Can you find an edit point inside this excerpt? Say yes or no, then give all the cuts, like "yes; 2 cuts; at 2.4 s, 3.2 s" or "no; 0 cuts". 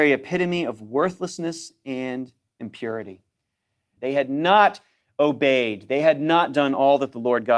yes; 1 cut; at 4.0 s